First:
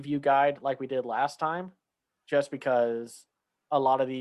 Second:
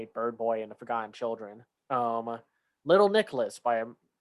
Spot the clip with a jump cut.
second; 1 cut; at 1.9 s

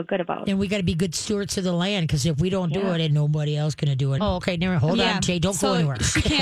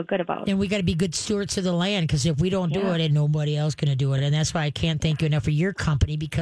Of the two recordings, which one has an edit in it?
first; 1 cut; at 4.2 s

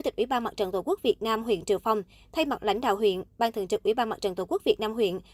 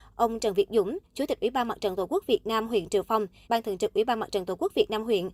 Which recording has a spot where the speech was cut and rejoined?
second; 2 cuts; at 1.0 s, 3.4 s

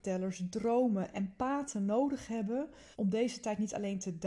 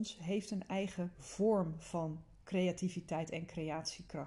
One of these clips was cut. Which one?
first; 1 cut; at 2.9 s

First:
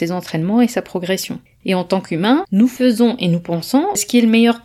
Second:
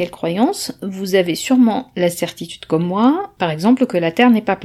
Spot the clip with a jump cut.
first; 1 cut; at 1.5 s

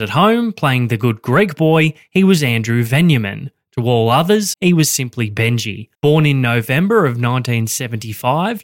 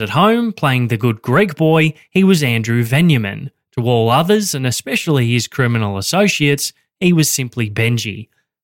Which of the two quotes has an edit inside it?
first; 2 cuts; at 4.5 s, 5.9 s

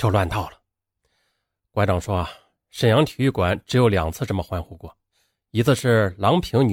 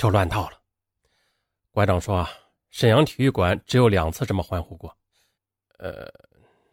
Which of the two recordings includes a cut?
second; 1 cut; at 5.4 s

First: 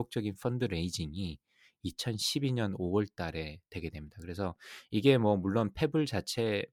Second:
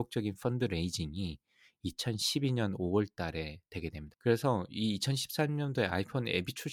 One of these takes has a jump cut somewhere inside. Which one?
second; 1 cut; at 4.1 s

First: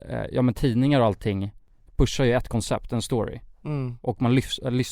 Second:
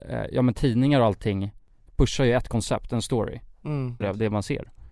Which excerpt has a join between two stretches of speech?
second; 1 cut; at 4.0 s

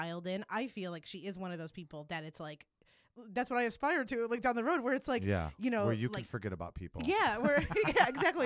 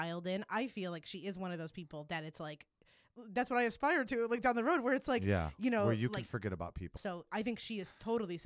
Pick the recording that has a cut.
second; 1 cut; at 7.0 s

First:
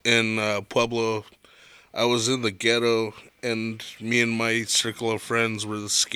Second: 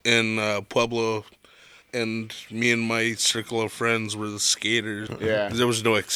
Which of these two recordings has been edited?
second; 2 cuts; at 1.8 s, 5.1 s

